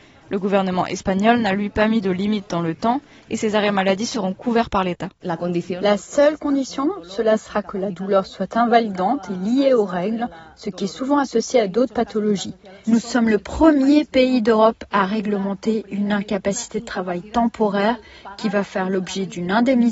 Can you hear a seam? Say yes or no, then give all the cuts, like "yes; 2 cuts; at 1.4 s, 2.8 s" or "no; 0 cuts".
yes; 1 cut; at 12.8 s